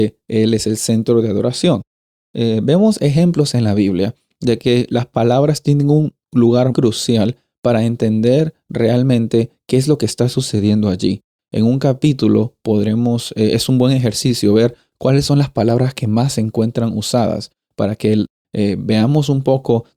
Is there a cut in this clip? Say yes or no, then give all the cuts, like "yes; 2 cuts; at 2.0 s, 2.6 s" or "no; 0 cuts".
yes; 1 cut; at 6.7 s